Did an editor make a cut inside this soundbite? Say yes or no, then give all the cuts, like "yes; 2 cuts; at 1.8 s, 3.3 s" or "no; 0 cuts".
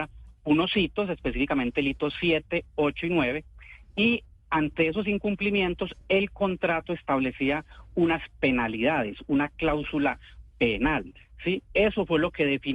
no; 0 cuts